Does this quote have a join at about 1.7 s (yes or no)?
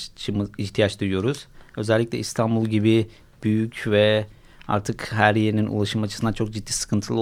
no